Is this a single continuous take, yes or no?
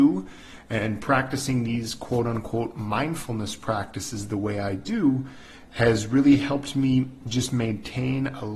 yes